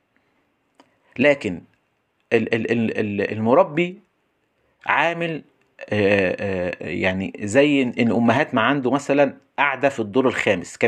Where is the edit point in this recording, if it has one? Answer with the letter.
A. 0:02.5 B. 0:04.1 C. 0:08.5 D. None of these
D